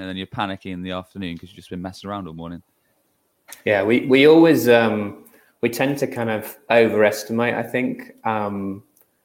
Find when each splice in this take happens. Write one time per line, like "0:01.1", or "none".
none